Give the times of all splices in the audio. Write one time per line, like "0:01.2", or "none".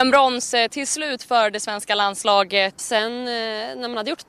0:02.8